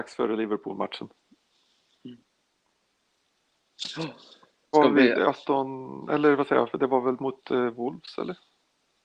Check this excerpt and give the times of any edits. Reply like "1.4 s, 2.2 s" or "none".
4.7 s